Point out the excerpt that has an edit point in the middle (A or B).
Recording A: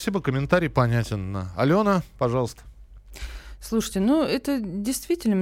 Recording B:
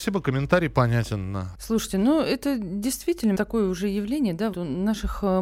B